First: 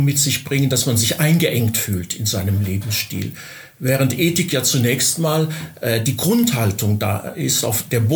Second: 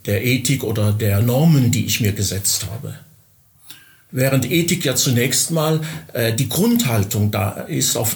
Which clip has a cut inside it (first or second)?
second